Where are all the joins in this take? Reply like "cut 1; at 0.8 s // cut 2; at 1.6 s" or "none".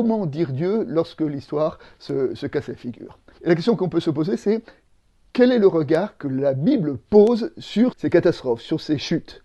cut 1; at 3.4 s // cut 2; at 7.9 s